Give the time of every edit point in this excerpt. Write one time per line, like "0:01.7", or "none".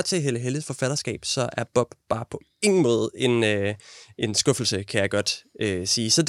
none